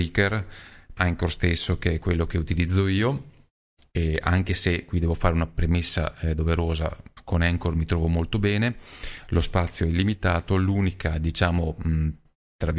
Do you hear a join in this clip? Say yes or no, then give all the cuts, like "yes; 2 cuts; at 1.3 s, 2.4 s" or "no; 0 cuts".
yes; 1 cut; at 1.0 s